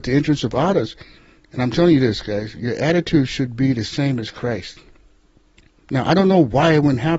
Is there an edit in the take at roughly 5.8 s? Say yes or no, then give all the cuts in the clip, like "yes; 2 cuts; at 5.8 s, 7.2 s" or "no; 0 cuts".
yes; 1 cut; at 5.8 s